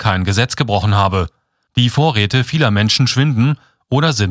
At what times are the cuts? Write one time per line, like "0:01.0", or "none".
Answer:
0:01.7